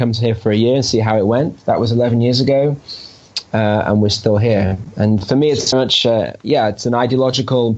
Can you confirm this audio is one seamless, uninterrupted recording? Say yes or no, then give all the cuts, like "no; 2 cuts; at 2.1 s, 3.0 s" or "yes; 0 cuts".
no; 1 cut; at 5.7 s